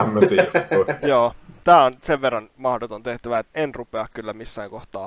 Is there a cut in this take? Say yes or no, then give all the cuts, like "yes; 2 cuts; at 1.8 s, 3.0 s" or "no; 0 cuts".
yes; 1 cut; at 3.5 s